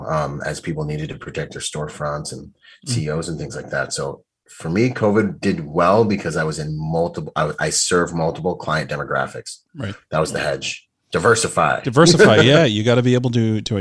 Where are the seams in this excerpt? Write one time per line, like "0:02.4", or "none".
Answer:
none